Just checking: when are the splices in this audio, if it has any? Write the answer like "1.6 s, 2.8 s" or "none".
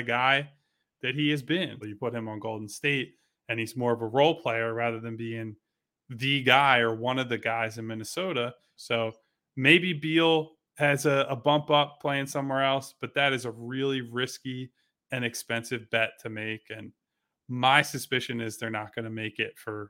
1.8 s, 8.8 s